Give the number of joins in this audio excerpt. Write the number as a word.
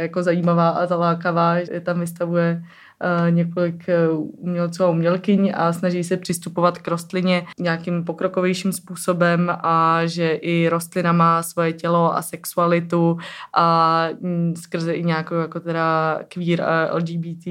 one